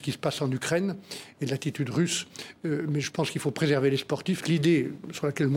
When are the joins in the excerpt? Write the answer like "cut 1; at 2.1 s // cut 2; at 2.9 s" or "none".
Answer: cut 1; at 4.4 s